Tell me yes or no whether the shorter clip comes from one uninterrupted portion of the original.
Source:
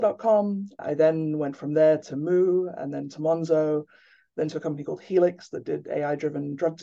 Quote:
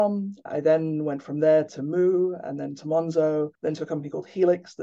no